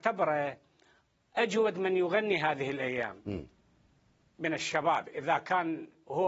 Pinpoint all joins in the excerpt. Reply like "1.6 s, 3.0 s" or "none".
none

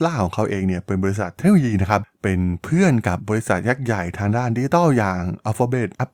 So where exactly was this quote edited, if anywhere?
none

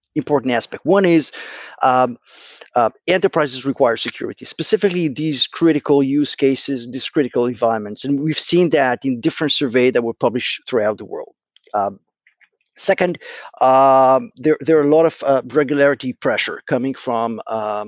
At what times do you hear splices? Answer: 14.3 s

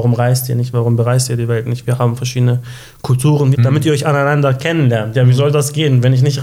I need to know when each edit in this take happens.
3.5 s

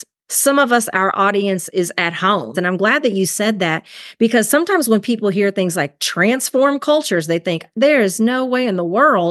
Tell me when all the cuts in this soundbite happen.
2.5 s

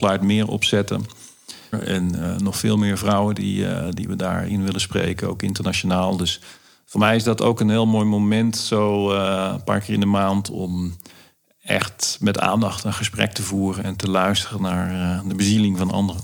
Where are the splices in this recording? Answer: 1.7 s

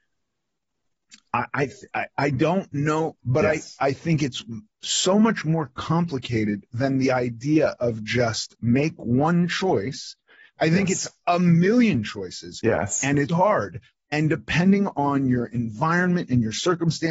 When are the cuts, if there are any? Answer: 3.2 s, 13.3 s

